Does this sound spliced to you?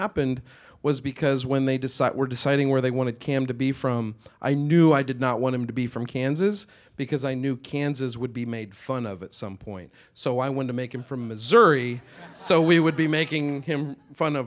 no; 0 cuts

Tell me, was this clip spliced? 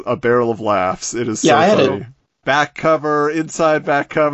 yes; 1 cut; at 2.4 s

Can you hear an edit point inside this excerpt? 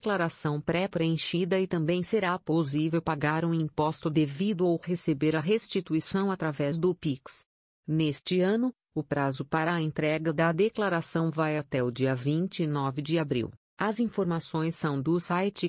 yes; 1 cut; at 13.7 s

